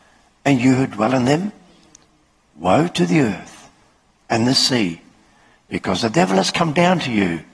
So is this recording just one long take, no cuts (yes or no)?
yes